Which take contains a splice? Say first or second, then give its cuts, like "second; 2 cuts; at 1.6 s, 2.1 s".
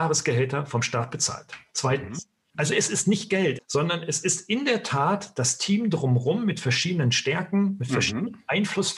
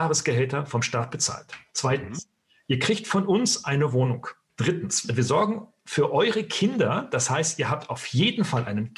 first; 2 cuts; at 2.5 s, 3.6 s